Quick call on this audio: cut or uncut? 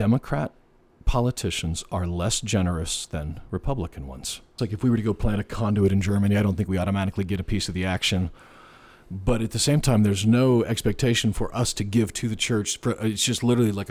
cut